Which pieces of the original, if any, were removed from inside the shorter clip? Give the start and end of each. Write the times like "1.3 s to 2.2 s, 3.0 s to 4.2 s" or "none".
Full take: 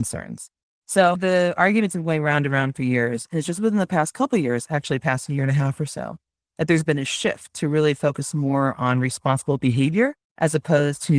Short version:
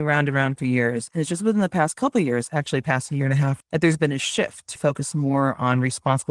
5.8 s to 6.5 s, 7.6 s to 7.9 s